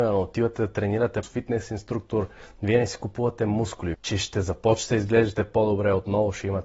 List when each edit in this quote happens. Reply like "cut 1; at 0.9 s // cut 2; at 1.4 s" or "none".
cut 1; at 1.2 s // cut 2; at 3.9 s

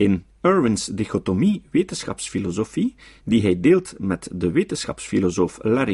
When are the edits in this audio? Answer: none

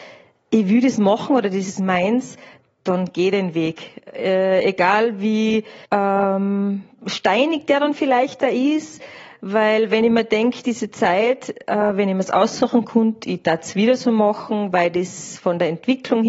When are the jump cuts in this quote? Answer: cut 1; at 5.8 s

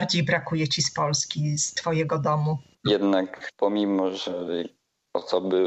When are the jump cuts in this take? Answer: cut 1; at 2.8 s

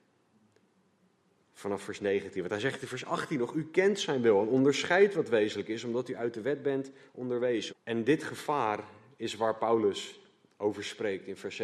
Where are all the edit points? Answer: cut 1; at 7.7 s

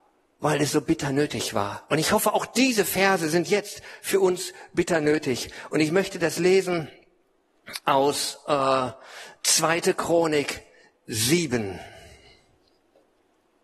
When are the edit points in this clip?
none

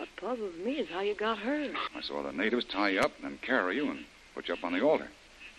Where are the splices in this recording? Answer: cut 1; at 1.9 s

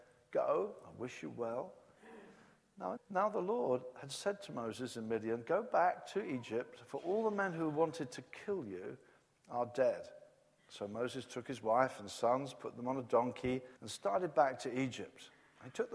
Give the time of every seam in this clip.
cut 1; at 3.0 s // cut 2; at 13.8 s

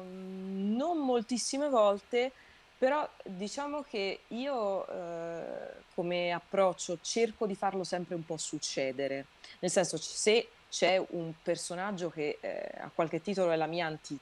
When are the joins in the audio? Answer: none

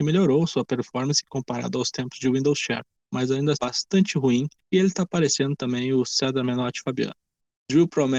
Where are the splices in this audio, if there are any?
cut 1; at 3.5 s

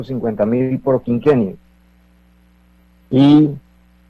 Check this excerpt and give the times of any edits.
none

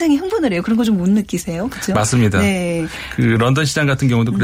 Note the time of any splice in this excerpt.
none

